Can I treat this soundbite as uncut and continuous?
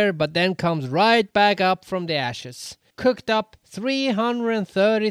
no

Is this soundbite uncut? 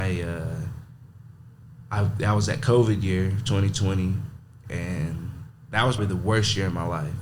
no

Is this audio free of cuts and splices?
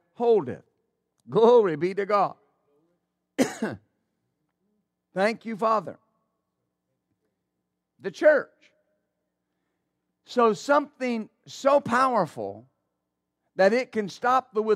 no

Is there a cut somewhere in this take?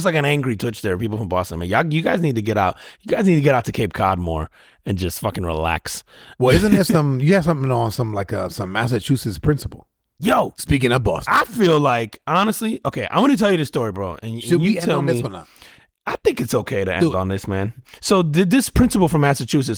no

